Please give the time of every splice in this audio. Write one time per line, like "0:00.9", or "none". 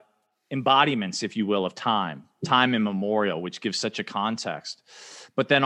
none